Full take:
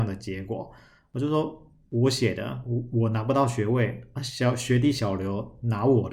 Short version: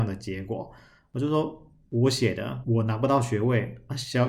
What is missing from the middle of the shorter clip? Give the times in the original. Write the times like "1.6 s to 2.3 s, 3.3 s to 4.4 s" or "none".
2.6 s to 2.9 s